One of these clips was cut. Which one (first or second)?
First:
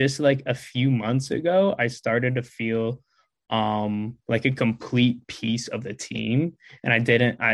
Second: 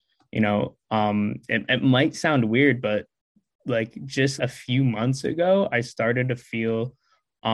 second